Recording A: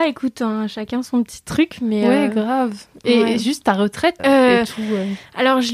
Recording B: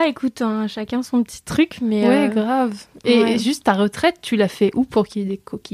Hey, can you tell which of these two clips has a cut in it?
A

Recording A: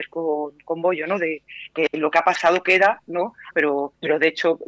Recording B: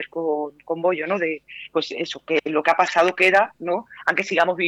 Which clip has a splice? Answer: A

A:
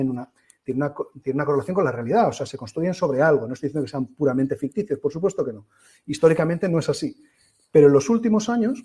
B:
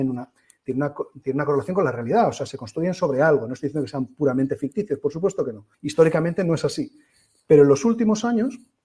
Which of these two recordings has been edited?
B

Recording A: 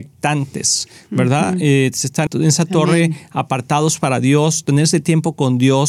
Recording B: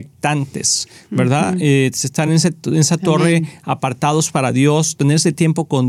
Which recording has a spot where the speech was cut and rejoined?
A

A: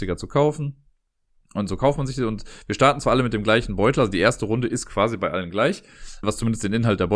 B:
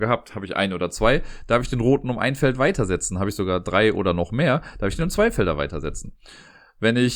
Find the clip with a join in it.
A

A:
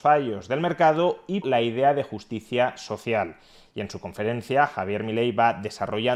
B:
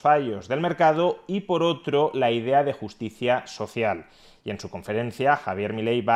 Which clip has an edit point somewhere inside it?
A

